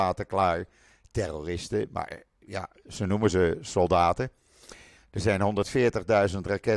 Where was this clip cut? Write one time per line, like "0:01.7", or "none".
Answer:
0:05.0